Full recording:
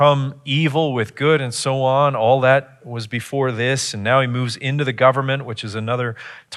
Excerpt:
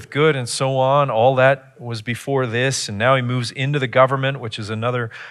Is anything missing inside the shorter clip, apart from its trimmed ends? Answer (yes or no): no